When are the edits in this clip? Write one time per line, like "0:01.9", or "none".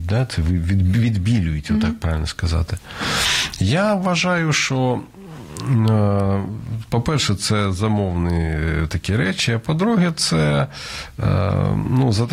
none